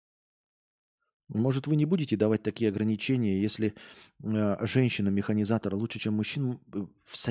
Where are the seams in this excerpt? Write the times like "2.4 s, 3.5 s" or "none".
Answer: none